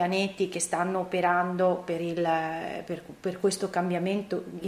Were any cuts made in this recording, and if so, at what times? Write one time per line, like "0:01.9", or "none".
none